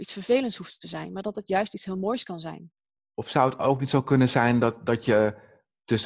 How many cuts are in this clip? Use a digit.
1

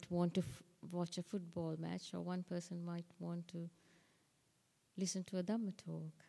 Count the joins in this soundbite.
0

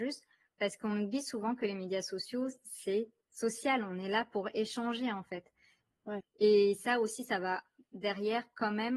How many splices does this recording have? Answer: 1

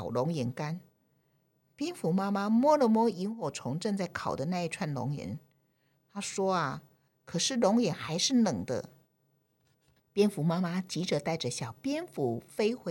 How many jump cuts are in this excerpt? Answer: 2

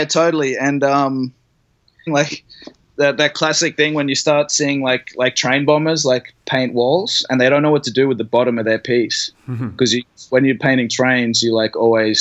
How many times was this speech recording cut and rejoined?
1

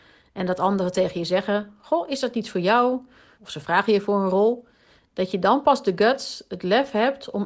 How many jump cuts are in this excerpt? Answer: 1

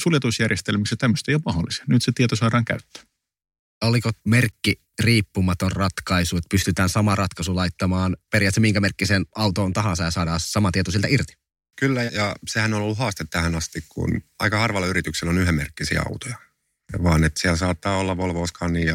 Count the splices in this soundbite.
1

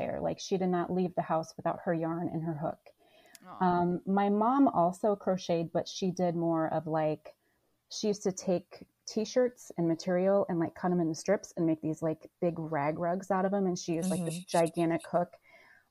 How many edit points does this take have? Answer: 0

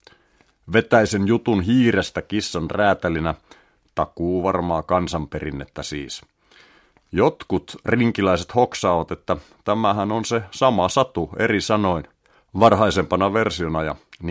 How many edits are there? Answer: 0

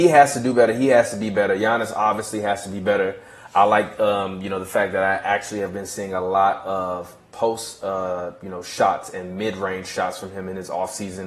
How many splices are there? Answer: 0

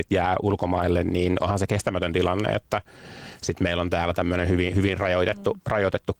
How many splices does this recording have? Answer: 0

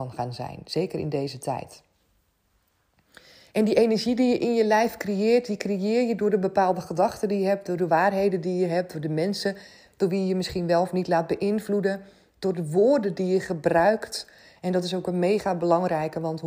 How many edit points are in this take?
0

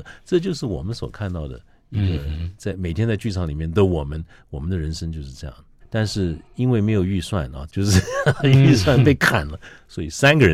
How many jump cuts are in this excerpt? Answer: 2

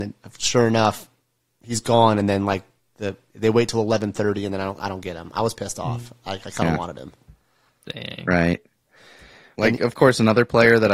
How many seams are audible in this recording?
2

